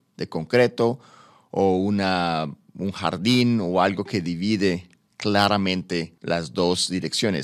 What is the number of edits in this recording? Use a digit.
1